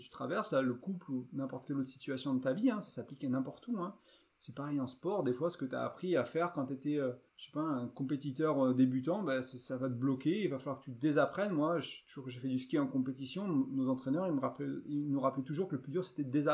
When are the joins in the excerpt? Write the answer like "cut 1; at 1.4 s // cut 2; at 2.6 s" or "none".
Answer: cut 1; at 7.3 s